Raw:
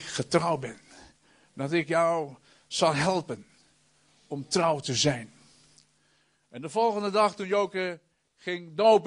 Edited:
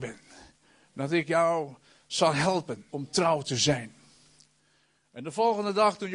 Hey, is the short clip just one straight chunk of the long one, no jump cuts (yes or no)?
no